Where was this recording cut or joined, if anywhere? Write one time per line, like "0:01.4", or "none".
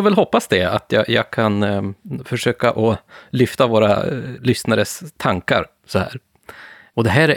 none